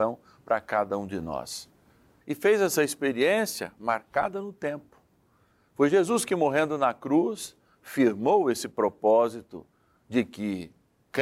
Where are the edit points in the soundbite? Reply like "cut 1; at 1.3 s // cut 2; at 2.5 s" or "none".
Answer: cut 1; at 2.2 s